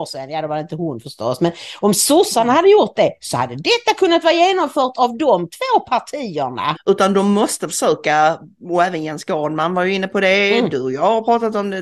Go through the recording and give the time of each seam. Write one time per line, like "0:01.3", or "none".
0:06.8